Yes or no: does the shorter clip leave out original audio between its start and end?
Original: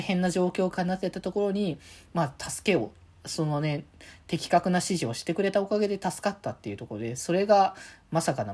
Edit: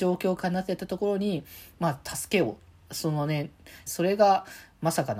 yes